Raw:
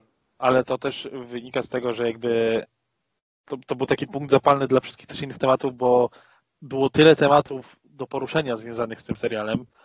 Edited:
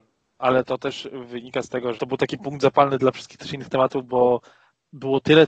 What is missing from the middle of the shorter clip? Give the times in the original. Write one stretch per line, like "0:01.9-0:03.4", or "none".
0:01.9-0:03.6

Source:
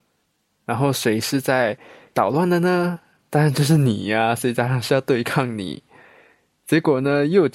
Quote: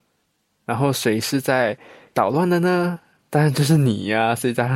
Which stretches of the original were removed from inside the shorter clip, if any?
none

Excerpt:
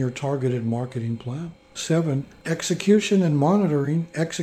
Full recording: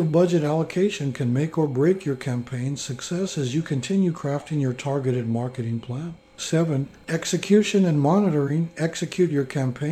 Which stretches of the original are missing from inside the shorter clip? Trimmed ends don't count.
none

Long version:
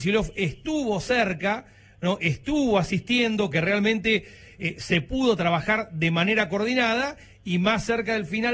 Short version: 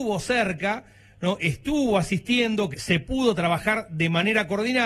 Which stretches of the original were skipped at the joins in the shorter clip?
0:03.5-0:04.7

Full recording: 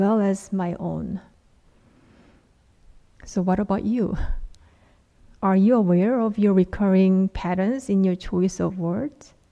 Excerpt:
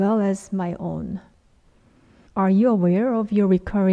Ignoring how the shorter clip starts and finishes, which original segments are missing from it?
0:02.3-0:05.3

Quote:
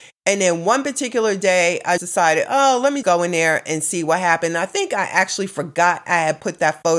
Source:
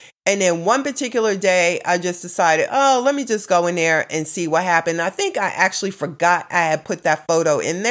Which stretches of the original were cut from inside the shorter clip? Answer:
0:02.0-0:02.2
0:03.2-0:03.5

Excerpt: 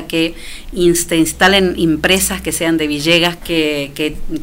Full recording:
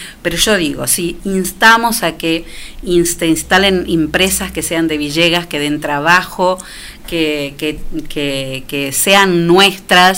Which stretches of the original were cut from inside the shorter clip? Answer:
0:05.5-0:07.0

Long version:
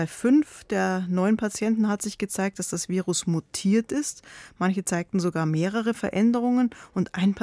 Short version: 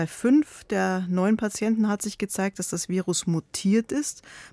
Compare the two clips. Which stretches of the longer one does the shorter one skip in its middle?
none

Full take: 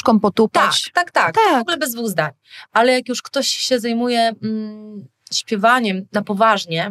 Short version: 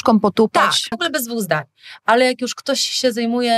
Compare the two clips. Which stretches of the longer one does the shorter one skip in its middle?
0:00.9-0:01.6

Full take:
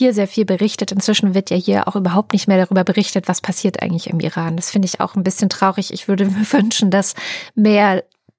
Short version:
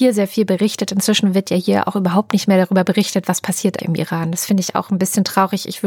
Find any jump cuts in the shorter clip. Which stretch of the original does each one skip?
0:03.8-0:04.0

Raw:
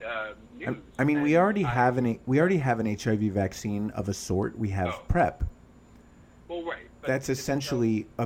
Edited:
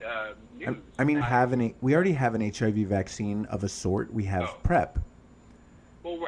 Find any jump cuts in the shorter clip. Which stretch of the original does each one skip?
0:01.2-0:01.7

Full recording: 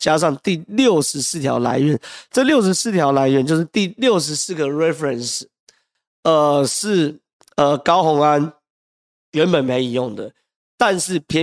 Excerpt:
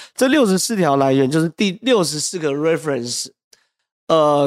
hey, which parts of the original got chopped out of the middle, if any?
none

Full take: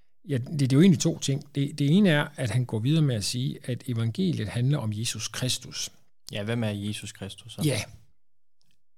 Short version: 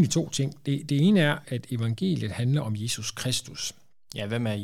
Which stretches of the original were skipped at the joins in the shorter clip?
0:02.3-0:03.6

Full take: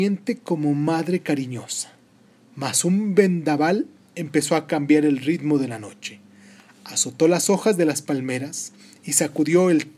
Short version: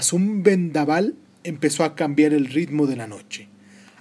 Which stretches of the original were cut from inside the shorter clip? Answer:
none

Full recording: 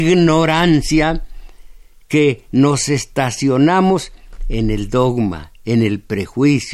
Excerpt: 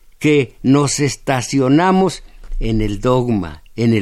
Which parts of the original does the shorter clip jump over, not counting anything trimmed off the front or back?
none

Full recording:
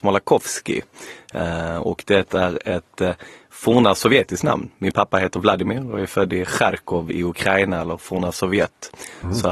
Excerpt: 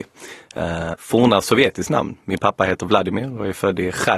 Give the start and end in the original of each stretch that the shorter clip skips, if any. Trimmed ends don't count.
0:01.7-0:03.5

